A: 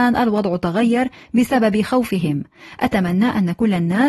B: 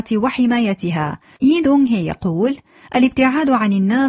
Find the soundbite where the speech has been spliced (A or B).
B